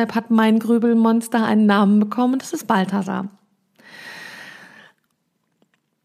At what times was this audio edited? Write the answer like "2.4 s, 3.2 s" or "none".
none